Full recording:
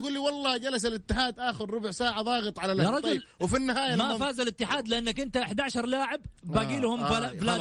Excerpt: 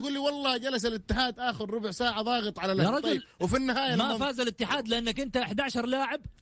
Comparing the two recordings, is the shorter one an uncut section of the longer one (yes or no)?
yes